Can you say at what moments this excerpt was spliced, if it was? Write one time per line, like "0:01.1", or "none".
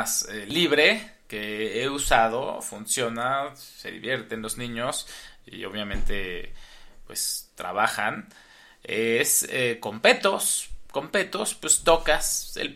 none